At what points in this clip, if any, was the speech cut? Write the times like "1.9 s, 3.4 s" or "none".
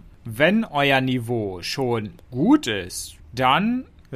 3.2 s